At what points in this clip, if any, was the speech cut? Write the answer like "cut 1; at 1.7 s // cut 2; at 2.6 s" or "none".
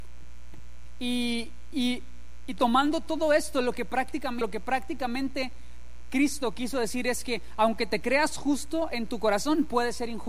cut 1; at 4.4 s